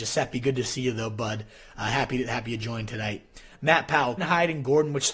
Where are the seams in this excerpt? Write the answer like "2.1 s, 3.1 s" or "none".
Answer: 4.2 s